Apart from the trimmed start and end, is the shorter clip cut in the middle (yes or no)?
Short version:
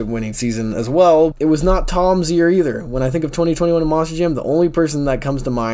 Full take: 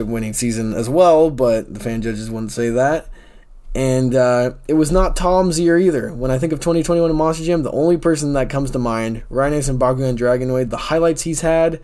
yes